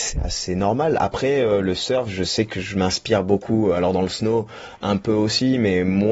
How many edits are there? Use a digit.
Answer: 0